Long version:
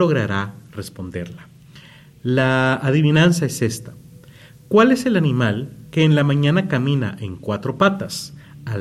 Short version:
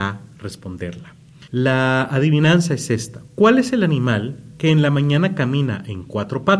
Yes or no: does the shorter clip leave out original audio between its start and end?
yes